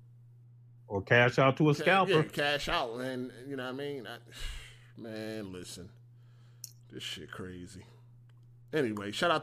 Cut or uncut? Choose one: uncut